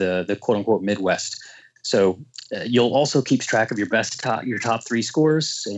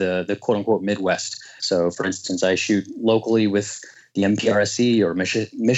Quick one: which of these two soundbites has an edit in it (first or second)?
second